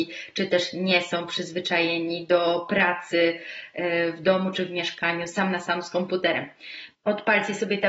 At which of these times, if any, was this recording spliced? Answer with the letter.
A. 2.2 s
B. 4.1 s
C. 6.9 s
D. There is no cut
C